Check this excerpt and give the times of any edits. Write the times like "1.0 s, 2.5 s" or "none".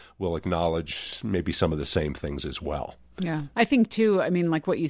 3.5 s